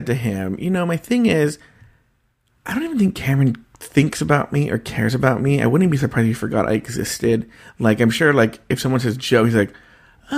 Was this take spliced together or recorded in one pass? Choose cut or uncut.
uncut